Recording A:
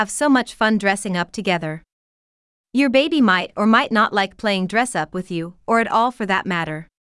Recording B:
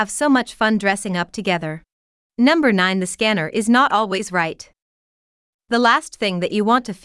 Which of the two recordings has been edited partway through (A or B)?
B